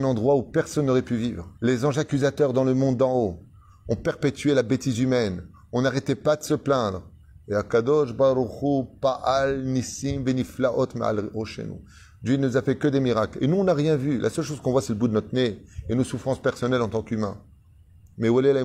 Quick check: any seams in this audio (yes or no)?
yes